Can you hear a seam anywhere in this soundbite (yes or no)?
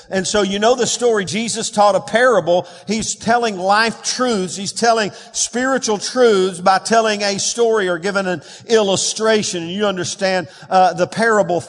no